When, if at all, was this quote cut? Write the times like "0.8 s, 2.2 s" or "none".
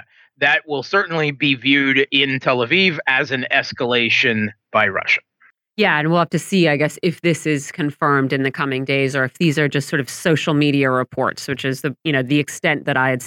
none